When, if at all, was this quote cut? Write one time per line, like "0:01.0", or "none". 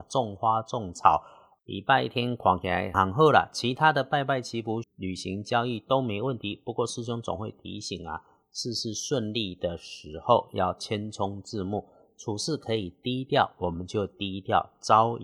0:02.9
0:04.8